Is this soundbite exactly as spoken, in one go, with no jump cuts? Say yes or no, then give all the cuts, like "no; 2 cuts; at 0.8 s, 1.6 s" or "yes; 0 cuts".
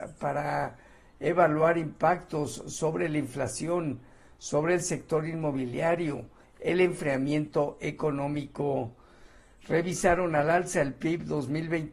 no; 1 cut; at 6.4 s